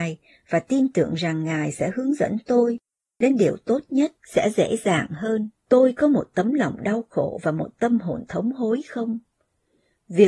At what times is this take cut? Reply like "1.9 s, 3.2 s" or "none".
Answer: 4.2 s, 5.6 s